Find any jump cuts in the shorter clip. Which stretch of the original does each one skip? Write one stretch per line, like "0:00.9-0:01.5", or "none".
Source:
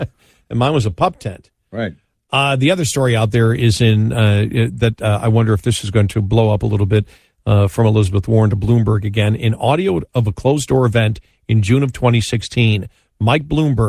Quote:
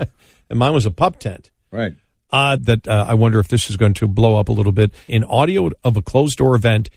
0:02.6-0:04.7
0:07.2-0:09.4